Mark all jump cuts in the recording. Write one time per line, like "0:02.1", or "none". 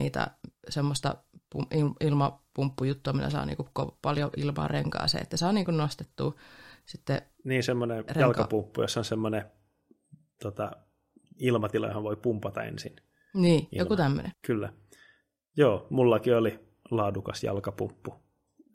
0:14.3